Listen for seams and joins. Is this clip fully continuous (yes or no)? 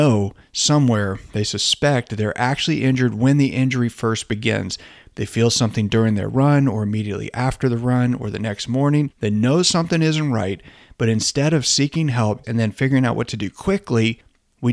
no